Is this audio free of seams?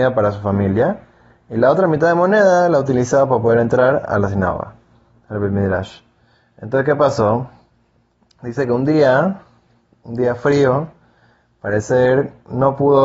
yes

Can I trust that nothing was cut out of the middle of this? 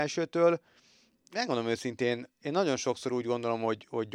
yes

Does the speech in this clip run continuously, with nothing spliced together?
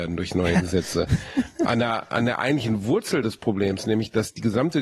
yes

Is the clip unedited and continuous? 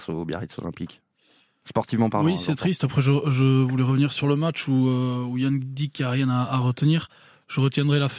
yes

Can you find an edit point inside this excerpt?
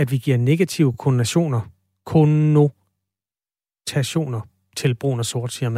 no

